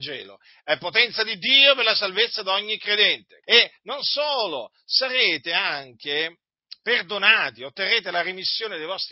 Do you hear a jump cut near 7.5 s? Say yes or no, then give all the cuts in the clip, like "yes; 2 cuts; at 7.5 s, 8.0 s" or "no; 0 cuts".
no; 1 cut; at 3.4 s